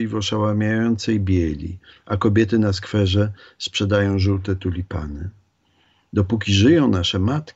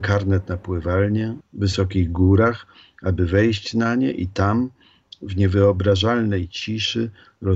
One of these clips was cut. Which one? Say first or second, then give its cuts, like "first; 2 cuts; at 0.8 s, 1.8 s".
second; 1 cut; at 1.4 s